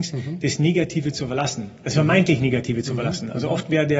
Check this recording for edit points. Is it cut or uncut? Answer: uncut